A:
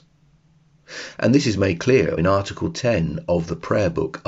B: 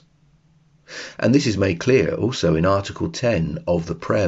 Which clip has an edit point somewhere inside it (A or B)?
A